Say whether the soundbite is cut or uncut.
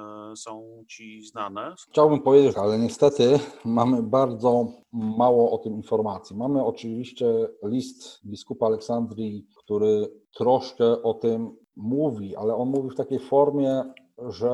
cut